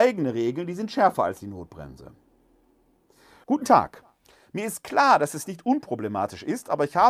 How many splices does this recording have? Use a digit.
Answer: 1